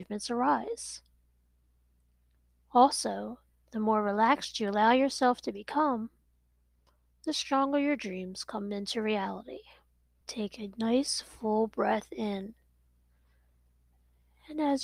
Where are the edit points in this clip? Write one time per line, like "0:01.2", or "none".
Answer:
0:10.2